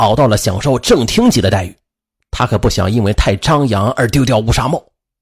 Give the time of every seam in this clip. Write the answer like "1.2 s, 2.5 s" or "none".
none